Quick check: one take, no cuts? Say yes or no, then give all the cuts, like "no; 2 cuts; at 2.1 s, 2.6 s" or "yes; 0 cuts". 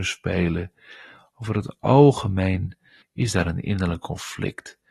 no; 1 cut; at 3.0 s